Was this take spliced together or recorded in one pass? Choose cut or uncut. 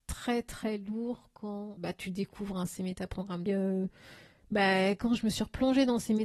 cut